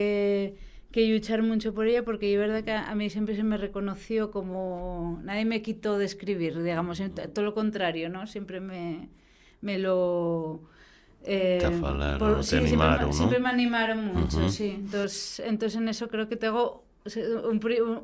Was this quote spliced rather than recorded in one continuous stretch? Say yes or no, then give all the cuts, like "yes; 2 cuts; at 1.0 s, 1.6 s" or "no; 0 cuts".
no; 0 cuts